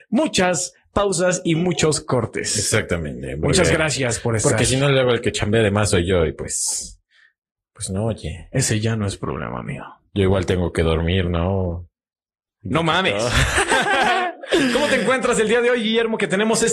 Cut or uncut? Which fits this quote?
uncut